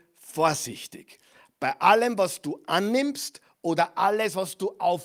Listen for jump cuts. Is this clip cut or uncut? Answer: uncut